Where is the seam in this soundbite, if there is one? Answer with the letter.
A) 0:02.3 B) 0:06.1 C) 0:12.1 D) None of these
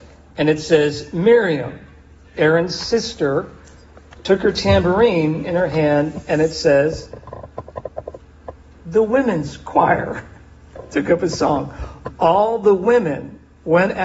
A